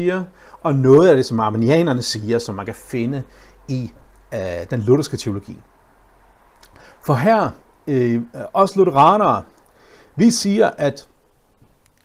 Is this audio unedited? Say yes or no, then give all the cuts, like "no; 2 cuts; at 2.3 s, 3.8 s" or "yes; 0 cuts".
yes; 0 cuts